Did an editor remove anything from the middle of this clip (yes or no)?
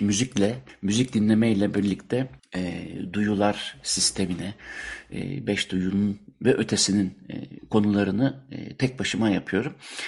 no